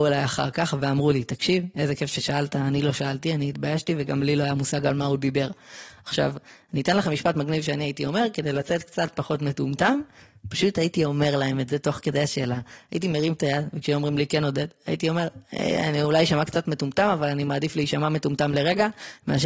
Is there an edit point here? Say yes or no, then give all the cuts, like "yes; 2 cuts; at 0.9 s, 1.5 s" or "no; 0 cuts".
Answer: no; 0 cuts